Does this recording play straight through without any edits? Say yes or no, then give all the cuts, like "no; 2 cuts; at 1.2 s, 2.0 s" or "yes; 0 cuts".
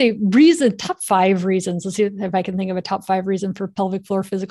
yes; 0 cuts